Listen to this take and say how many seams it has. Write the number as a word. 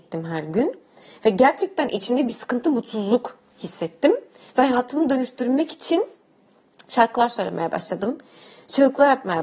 zero